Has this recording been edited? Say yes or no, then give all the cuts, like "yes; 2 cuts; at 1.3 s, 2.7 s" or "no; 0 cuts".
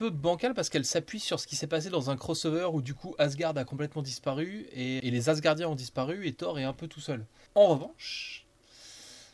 yes; 2 cuts; at 5.0 s, 7.5 s